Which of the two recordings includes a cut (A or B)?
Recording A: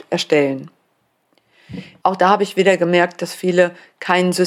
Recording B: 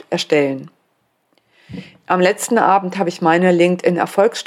A